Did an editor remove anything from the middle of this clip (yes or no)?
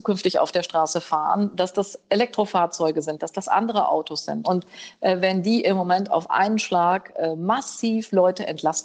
yes